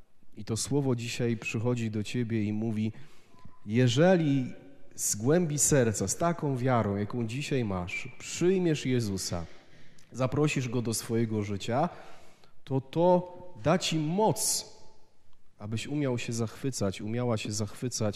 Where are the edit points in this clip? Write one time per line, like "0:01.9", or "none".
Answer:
none